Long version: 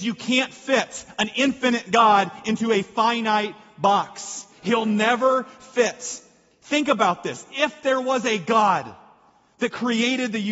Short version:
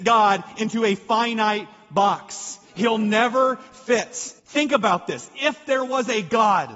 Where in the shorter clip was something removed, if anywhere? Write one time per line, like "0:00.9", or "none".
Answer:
0:04.4